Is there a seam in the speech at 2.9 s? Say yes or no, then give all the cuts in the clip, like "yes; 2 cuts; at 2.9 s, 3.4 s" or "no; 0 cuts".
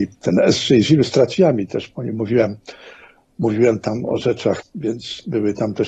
no; 1 cut; at 4.6 s